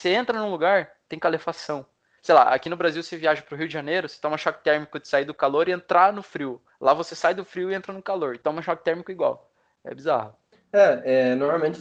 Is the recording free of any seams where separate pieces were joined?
no; 1 cut; at 2.2 s

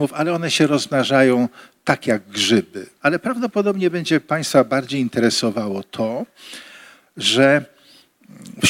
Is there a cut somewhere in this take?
yes; 1 cut; at 3.0 s

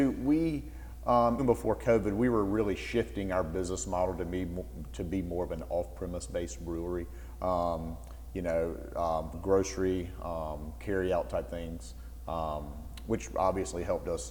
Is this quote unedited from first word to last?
no; 2 cuts; at 1.4 s, 9.3 s

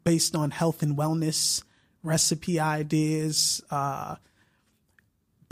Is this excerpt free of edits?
yes; 0 cuts

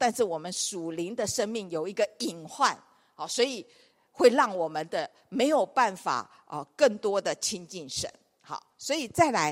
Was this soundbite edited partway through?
no; 0 cuts

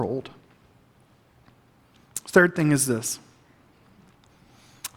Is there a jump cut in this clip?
no; 0 cuts

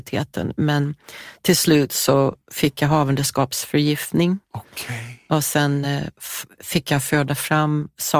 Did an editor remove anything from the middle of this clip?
no; 0 cuts

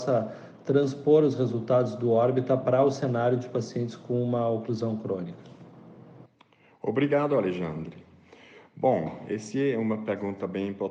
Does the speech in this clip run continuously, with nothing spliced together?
yes; 0 cuts

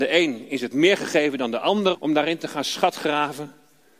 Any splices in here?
yes; 1 cut; at 1.9 s

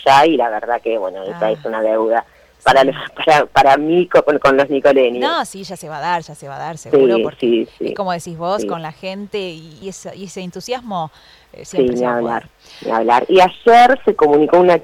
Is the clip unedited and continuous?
no; 1 cut; at 9.8 s

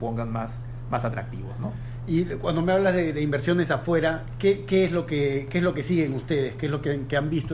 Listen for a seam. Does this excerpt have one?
no; 0 cuts

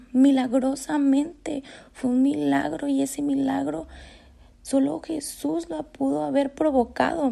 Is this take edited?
no; 0 cuts

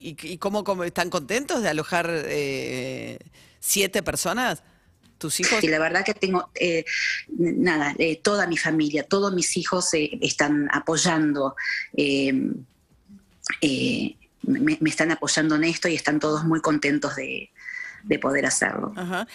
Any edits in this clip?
yes; 1 cut; at 5.6 s

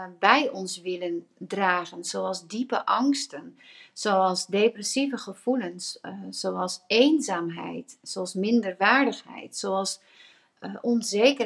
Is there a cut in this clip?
no; 0 cuts

